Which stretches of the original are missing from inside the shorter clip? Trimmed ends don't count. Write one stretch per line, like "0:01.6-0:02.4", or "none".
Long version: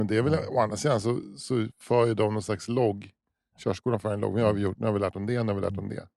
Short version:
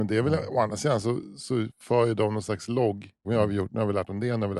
0:03.2-0:04.3